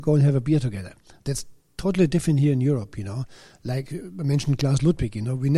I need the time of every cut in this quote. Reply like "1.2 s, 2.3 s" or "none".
none